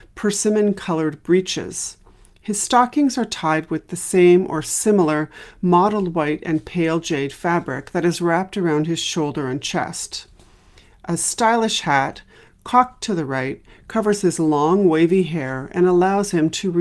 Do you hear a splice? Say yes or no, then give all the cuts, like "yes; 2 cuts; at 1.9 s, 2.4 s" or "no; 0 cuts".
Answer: no; 0 cuts